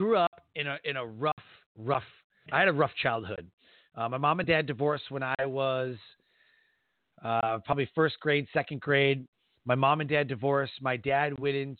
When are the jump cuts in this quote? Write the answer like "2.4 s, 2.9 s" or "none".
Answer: 2.5 s